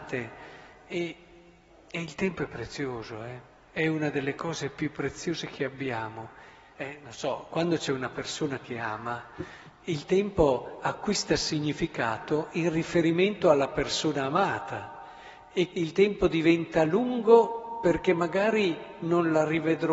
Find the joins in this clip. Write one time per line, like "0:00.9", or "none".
0:06.7
0:15.7

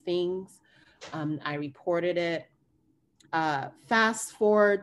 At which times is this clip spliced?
0:03.2

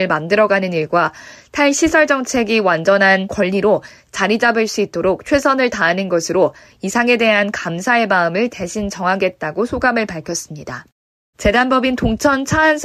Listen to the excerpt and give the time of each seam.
0:11.3

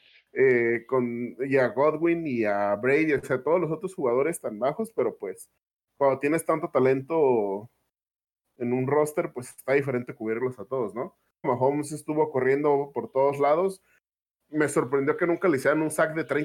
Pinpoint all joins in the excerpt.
0:11.4

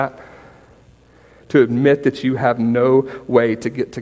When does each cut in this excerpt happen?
0:01.4

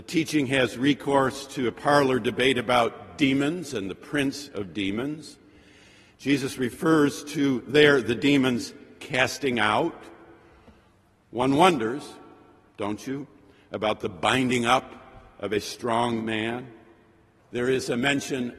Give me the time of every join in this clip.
0:17.4

